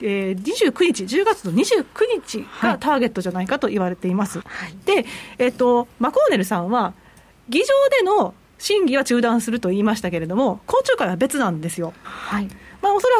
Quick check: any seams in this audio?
yes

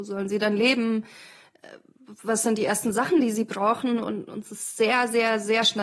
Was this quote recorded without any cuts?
yes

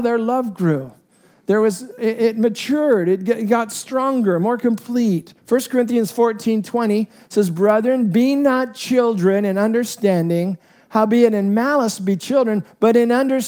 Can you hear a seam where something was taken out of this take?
yes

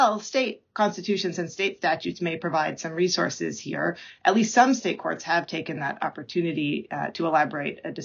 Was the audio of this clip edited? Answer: no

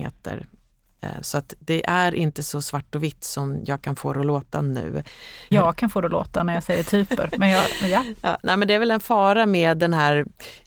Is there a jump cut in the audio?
yes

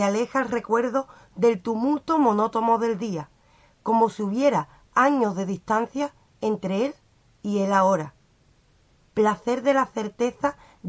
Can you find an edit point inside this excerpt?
yes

